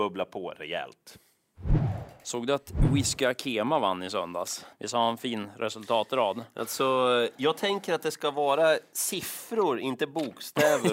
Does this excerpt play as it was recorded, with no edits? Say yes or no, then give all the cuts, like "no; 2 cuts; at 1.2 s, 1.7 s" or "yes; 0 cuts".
no; 1 cut; at 4.7 s